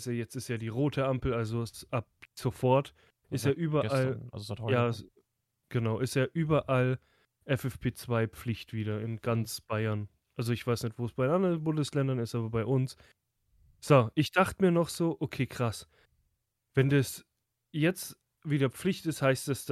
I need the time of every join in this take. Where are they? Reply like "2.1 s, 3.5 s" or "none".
none